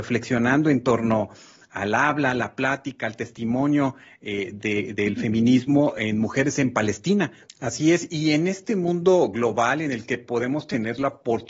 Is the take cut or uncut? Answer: cut